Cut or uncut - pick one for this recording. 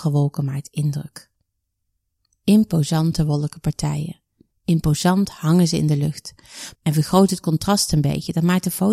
cut